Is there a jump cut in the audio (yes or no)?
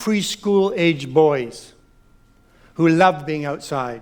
no